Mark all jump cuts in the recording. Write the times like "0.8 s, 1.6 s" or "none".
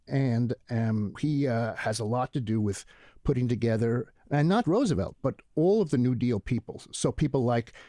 1.2 s, 4.6 s